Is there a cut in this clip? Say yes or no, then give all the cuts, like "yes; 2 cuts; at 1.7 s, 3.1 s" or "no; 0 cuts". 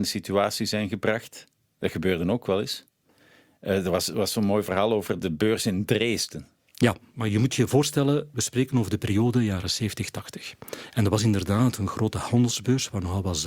yes; 1 cut; at 5.2 s